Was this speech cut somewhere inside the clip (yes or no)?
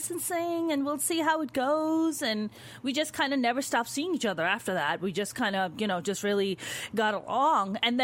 no